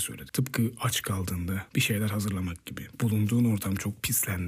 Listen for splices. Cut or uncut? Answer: uncut